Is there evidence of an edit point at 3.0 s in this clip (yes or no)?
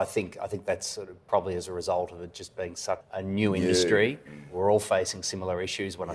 yes